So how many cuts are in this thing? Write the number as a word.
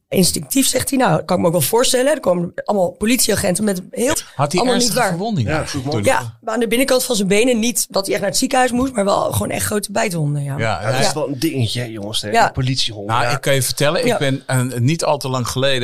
one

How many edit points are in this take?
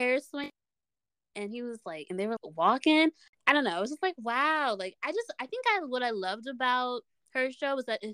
one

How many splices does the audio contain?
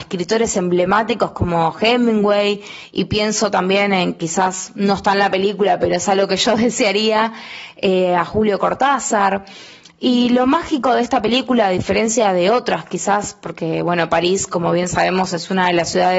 zero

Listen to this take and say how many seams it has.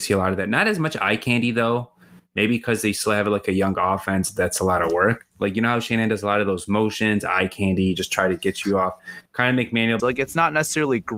one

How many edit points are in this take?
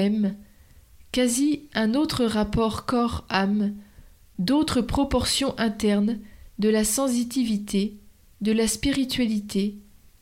zero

